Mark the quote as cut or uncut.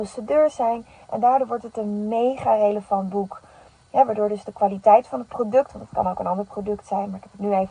cut